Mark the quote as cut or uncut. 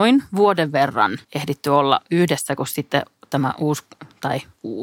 cut